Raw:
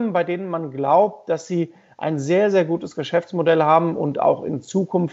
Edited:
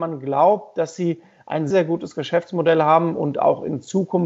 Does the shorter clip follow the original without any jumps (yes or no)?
no